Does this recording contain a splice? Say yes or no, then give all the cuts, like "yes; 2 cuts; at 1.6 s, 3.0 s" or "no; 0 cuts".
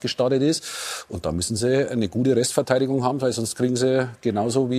no; 0 cuts